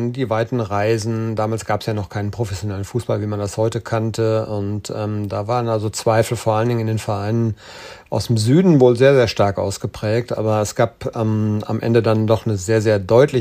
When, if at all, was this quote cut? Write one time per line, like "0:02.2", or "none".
none

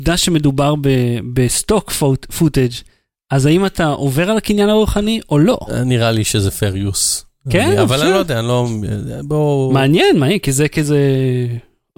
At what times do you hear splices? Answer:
none

